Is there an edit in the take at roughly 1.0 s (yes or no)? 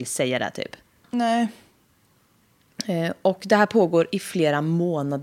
yes